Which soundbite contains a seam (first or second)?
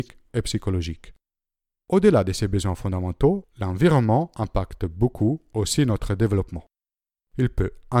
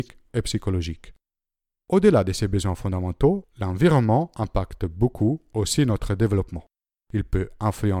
second